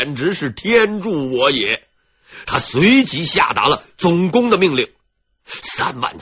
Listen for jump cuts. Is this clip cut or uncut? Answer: cut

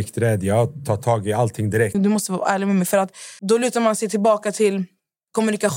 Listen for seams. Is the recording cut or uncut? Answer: cut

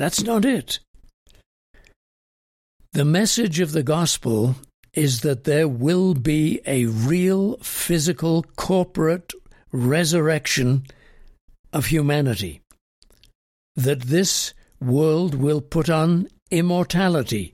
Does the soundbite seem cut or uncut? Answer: uncut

